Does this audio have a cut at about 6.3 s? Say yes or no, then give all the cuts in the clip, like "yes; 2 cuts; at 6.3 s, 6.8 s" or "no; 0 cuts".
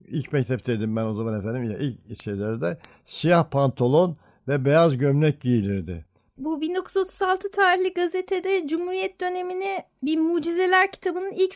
no; 0 cuts